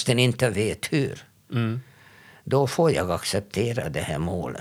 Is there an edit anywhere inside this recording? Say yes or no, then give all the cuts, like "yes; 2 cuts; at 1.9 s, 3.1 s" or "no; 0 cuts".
no; 0 cuts